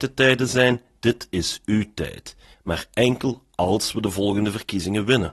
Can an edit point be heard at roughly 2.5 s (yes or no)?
yes